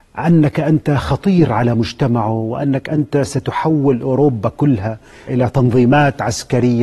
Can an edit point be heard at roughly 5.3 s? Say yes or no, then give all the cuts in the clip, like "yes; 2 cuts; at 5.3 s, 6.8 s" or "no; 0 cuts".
yes; 1 cut; at 5.3 s